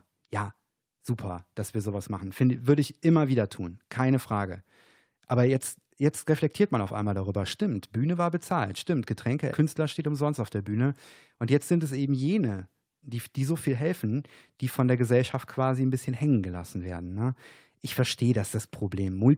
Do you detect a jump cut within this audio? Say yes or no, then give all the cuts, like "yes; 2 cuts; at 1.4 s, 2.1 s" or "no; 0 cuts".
yes; 2 cuts; at 9.5 s, 13.0 s